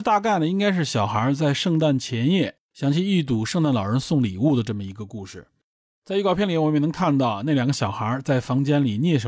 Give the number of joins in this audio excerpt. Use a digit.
0